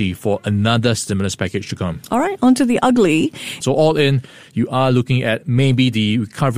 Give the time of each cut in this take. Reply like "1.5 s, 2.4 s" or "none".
3.6 s